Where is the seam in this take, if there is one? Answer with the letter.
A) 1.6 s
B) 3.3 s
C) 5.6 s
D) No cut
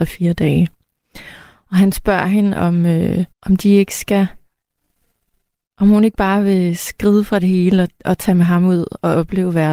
B